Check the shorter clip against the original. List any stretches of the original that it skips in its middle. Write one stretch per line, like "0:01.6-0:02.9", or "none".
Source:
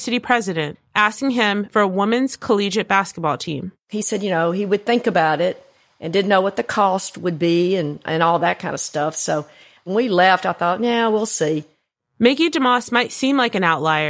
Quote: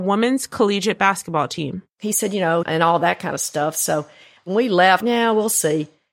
0:04.5-0:08.0
0:10.4-0:10.8